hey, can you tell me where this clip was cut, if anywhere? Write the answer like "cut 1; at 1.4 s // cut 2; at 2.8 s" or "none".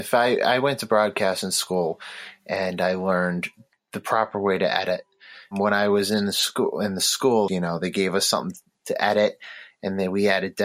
cut 1; at 7.5 s